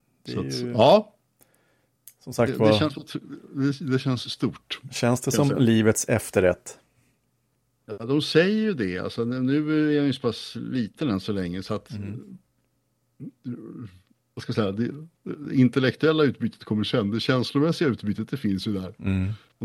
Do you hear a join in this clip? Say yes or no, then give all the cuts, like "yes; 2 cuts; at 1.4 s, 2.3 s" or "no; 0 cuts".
no; 0 cuts